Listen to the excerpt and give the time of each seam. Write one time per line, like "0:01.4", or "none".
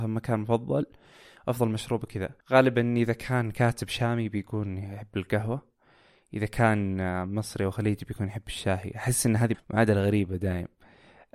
0:02.4
0:09.5